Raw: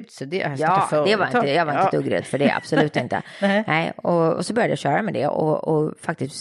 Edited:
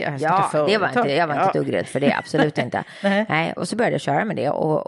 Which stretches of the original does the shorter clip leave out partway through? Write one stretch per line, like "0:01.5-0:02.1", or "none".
0:04.0-0:04.3